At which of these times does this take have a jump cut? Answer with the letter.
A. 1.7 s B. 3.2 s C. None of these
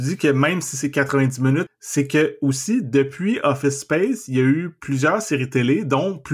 A